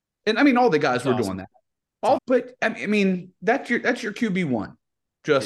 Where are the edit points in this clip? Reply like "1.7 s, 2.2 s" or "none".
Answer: 2.2 s